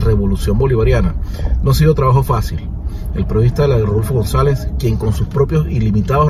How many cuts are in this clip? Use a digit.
0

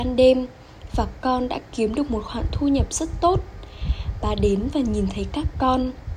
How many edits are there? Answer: 1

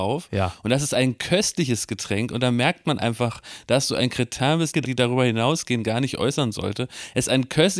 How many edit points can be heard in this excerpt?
1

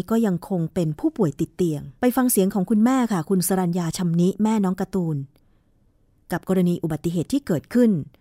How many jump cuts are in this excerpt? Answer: 1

